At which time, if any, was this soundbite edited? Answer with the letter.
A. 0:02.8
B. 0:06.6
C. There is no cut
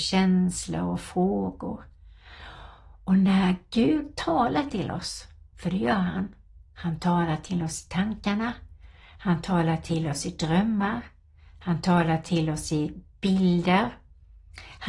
C